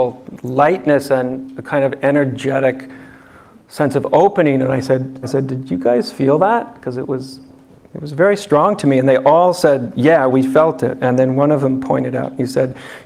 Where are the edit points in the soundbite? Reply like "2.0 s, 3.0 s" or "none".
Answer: 5.2 s